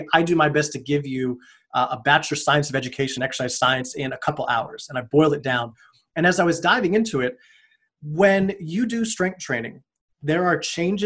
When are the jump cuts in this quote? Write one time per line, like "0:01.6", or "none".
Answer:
none